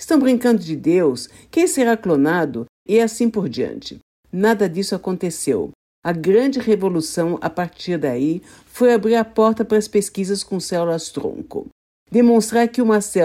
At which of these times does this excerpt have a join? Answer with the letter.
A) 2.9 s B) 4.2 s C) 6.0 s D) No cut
A